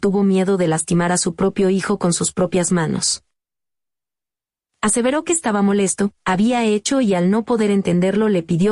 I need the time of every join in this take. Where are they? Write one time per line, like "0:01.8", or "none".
0:04.6
0:06.2

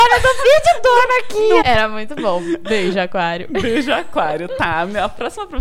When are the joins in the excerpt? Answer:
0:01.6

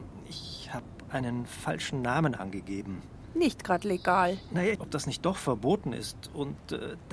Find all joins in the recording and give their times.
0:04.7

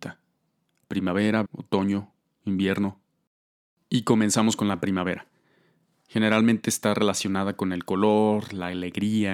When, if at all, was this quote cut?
0:01.5

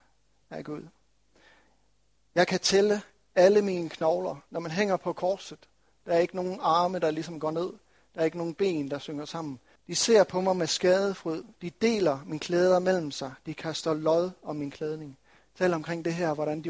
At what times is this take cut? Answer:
0:09.8

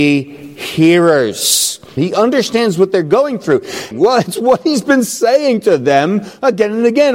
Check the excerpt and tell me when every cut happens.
0:02.0
0:03.9

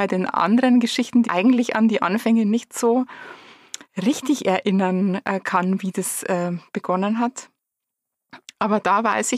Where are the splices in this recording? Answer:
0:01.2
0:03.8

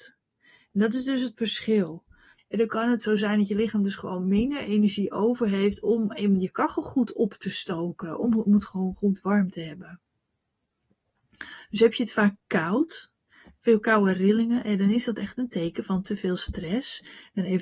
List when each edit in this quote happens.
0:02.4

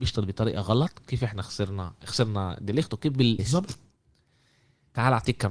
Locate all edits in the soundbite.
0:03.4

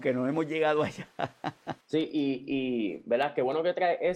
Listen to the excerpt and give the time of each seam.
0:01.8

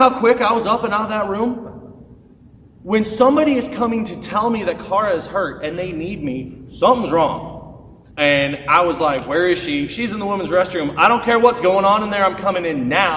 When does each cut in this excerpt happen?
0:08.1

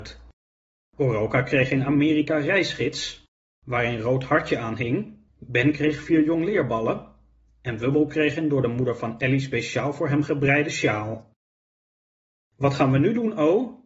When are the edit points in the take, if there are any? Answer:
0:03.4
0:05.3

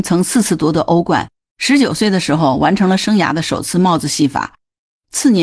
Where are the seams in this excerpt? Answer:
0:01.5

